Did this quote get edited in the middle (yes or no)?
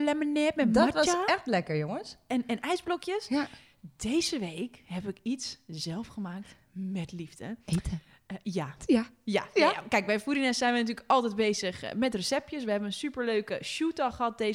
no